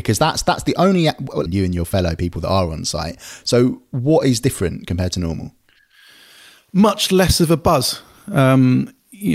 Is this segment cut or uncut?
cut